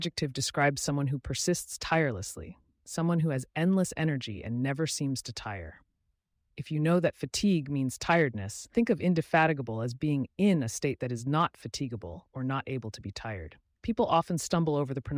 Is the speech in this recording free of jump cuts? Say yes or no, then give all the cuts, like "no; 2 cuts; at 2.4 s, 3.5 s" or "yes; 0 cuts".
no; 1 cut; at 8.7 s